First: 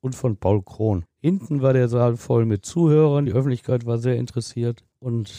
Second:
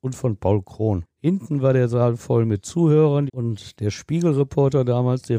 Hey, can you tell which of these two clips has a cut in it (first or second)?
second